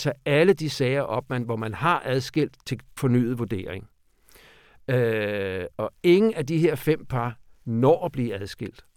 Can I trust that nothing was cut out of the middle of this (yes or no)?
yes